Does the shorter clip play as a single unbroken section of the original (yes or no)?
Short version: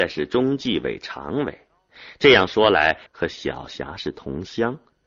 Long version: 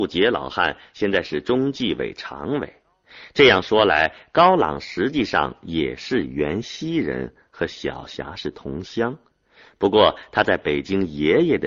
no